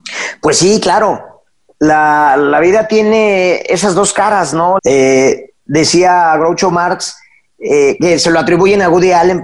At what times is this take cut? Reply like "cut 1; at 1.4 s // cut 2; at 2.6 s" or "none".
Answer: cut 1; at 4.8 s